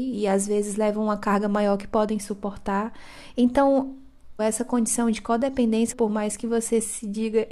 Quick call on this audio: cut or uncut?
cut